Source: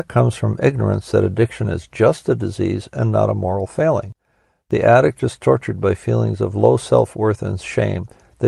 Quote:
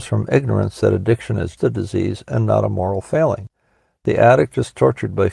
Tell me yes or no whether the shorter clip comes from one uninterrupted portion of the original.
no